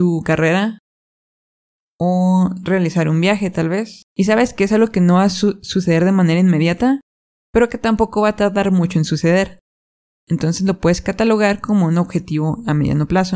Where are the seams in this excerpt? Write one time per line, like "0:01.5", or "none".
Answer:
0:04.1